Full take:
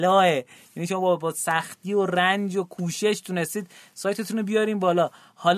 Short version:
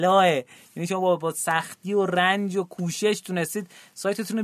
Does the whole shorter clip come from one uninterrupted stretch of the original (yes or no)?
yes